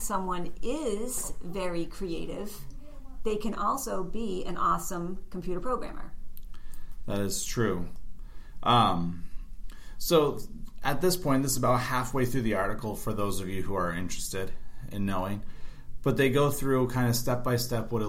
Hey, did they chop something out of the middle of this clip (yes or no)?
no